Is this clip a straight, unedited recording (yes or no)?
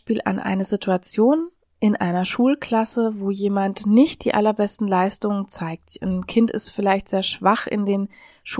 yes